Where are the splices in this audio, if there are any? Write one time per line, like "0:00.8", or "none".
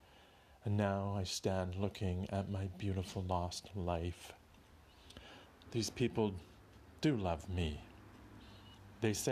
0:05.6